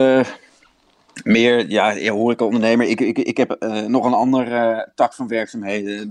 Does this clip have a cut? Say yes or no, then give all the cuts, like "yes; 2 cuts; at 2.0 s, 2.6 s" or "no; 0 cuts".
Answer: no; 0 cuts